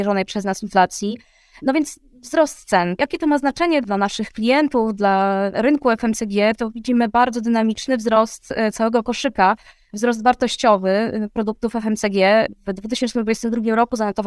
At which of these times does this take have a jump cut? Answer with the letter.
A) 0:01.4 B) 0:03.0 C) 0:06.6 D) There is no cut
D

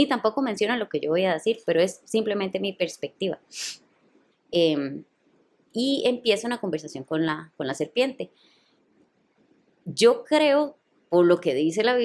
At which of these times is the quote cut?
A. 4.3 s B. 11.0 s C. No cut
A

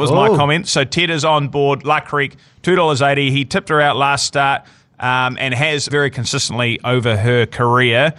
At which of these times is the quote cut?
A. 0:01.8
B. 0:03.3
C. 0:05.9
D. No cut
C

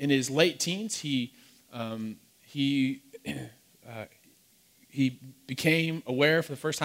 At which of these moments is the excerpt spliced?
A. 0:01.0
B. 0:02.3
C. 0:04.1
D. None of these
D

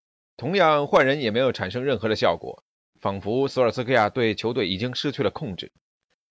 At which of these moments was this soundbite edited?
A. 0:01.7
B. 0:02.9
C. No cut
B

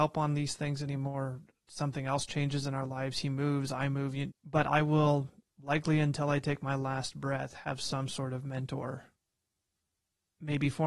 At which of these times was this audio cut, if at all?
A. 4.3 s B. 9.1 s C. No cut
A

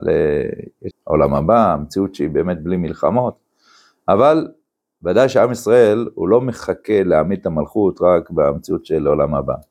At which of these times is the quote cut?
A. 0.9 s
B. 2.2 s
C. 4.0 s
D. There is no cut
A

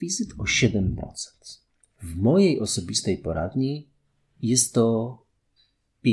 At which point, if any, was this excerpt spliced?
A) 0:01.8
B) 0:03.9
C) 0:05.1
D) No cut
A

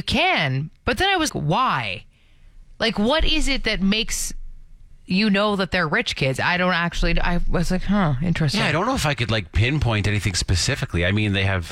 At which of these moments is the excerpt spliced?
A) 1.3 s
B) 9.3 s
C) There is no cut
A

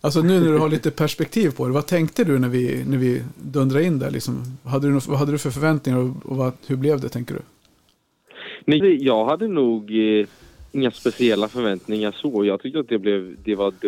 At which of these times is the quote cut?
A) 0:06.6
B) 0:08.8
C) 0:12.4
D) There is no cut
B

